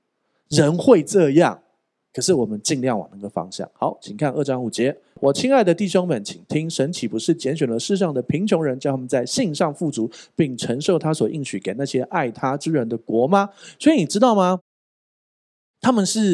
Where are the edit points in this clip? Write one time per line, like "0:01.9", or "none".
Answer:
none